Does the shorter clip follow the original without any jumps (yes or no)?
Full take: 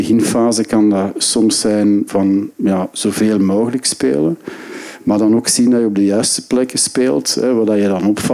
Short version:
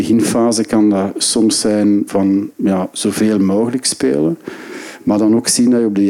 yes